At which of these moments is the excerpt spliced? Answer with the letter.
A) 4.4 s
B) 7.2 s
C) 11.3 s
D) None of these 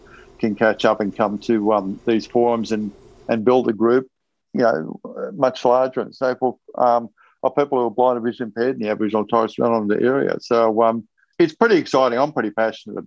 C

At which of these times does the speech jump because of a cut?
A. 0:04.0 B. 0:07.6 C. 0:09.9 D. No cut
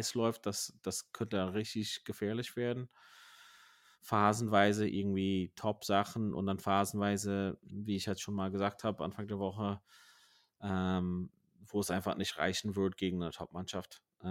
A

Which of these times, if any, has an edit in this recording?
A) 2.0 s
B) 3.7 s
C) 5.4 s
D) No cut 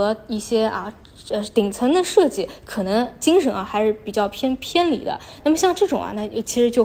C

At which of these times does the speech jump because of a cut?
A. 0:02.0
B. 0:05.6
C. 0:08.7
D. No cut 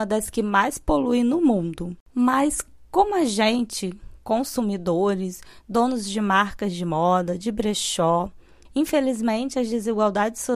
C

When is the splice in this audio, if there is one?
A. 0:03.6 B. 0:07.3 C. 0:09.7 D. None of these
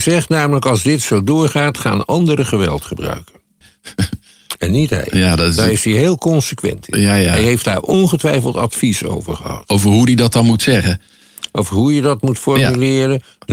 A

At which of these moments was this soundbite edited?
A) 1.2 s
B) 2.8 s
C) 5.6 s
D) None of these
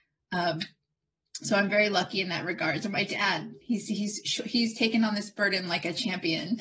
D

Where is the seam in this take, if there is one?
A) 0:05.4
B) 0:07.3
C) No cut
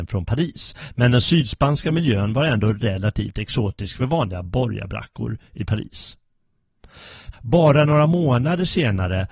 B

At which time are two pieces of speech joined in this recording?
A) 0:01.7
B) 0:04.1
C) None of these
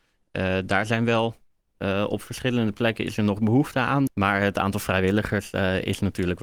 B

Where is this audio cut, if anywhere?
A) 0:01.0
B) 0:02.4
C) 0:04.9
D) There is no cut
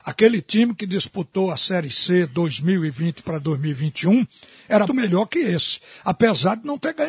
C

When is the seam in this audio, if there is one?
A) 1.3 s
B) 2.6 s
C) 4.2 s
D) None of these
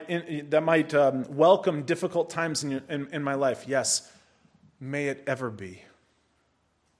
D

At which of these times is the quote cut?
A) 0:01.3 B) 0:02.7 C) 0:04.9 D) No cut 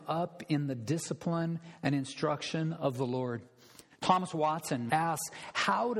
C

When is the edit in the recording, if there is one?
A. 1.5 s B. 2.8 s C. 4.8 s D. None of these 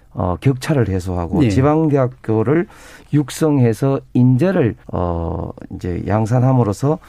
C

